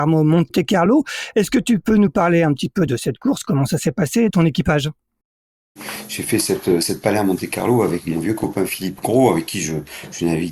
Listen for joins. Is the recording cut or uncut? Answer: cut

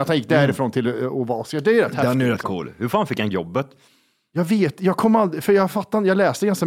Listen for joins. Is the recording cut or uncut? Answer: uncut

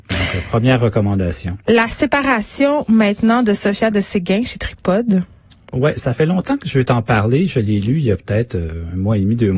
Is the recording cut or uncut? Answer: uncut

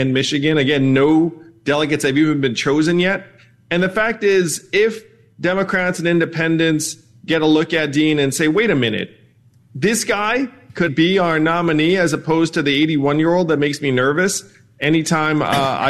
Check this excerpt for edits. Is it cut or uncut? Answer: cut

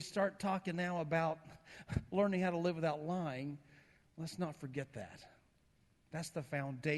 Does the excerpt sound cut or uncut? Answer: uncut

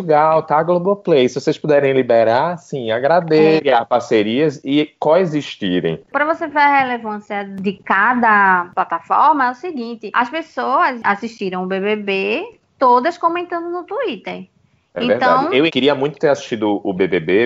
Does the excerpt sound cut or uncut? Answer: cut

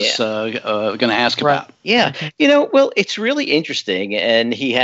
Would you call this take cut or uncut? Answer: cut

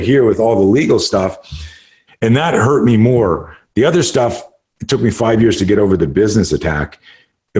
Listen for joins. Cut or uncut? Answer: cut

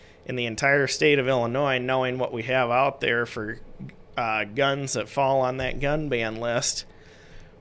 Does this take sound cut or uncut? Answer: uncut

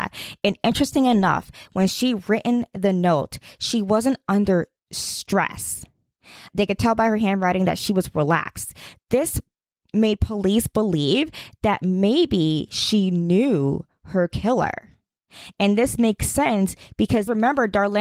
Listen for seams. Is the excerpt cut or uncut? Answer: uncut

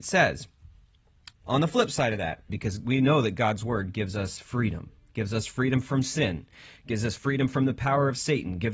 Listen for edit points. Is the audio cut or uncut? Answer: cut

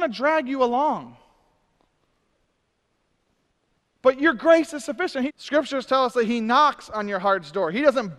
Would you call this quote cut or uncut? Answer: cut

